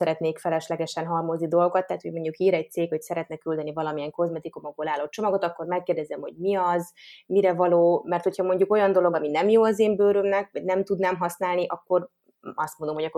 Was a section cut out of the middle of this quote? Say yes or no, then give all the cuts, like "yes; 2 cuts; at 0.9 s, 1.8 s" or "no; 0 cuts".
no; 0 cuts